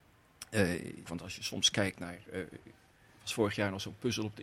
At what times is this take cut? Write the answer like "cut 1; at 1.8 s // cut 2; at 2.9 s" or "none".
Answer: cut 1; at 1.1 s